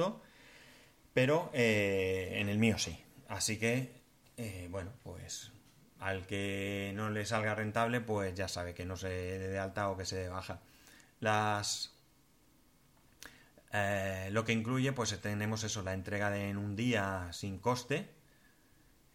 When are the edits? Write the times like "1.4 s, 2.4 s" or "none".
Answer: none